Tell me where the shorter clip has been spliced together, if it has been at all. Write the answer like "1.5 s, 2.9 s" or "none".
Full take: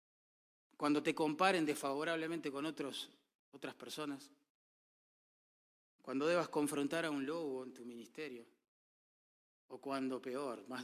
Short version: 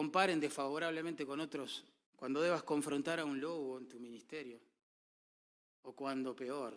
2.1 s